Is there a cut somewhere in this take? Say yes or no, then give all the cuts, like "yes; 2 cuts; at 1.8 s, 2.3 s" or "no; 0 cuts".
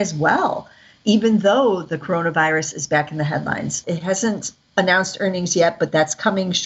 yes; 1 cut; at 3.8 s